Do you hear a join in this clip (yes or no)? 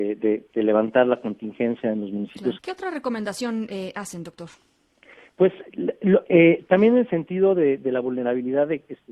yes